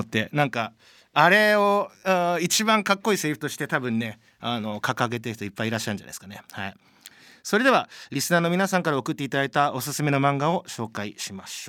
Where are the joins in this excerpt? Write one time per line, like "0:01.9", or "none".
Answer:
none